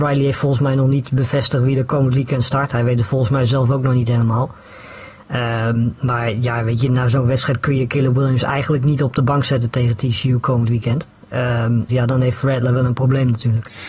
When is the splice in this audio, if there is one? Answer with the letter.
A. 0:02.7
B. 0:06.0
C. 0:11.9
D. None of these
C